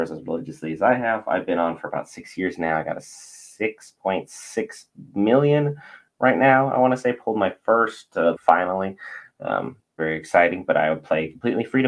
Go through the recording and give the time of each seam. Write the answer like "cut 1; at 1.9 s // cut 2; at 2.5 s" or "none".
cut 1; at 8.3 s // cut 2; at 10.0 s